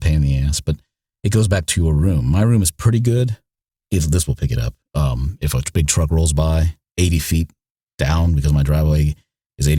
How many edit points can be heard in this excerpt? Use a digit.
1